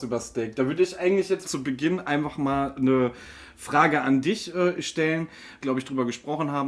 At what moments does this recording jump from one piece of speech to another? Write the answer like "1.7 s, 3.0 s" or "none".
1.4 s, 5.6 s